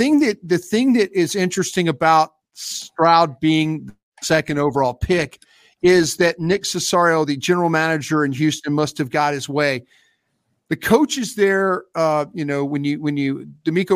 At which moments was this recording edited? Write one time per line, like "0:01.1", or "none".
none